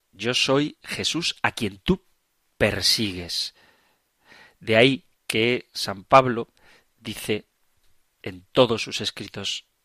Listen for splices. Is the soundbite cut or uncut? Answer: uncut